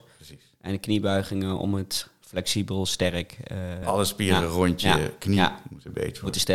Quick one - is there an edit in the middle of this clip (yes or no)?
no